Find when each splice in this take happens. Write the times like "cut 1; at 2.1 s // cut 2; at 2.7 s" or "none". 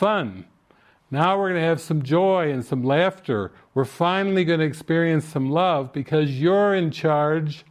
none